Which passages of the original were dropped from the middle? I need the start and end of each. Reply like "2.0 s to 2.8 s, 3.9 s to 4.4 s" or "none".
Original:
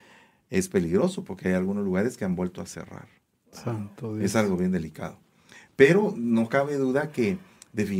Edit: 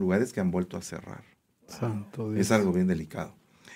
none